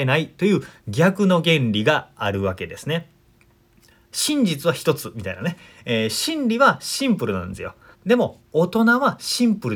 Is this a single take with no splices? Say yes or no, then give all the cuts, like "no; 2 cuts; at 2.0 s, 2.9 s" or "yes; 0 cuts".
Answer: no; 1 cut; at 7.9 s